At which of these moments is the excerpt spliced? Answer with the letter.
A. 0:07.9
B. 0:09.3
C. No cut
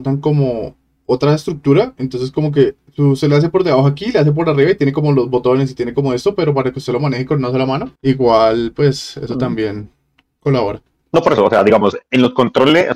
A